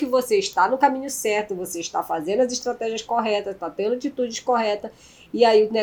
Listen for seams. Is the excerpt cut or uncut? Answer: uncut